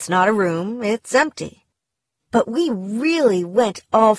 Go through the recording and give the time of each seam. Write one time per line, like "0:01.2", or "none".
none

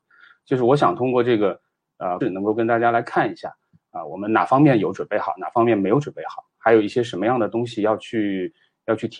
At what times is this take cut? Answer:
0:02.2

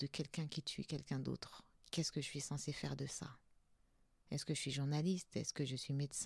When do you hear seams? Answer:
none

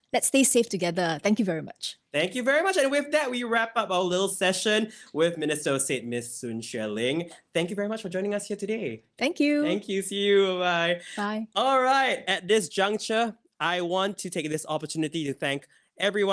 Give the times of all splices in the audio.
none

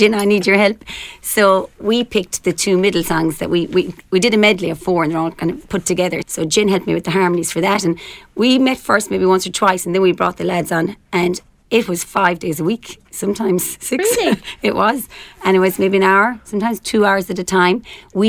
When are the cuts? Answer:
0:06.2

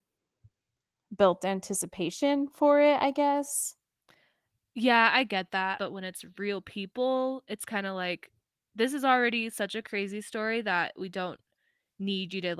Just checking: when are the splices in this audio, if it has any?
0:05.8

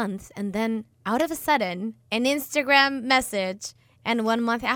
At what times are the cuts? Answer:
0:02.0

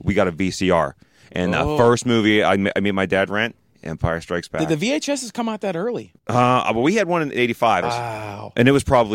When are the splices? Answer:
0:06.2
0:07.8

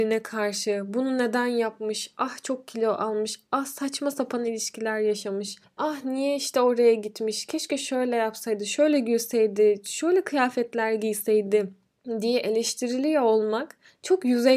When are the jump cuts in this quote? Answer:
none

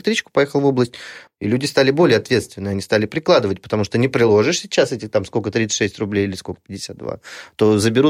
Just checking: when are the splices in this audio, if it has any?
0:01.3

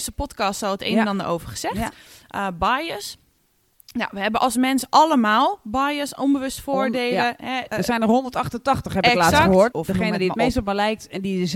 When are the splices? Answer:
0:07.7
0:09.7

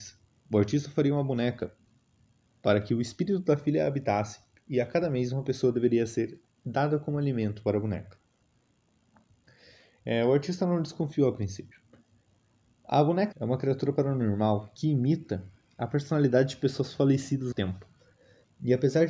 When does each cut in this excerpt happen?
0:13.3
0:17.5

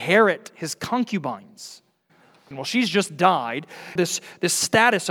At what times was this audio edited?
0:02.5
0:04.0

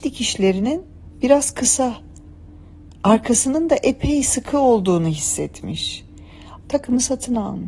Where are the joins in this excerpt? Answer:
0:06.6

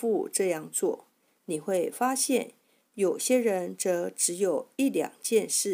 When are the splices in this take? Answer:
0:02.9

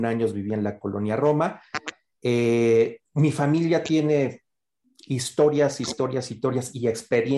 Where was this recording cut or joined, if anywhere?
none

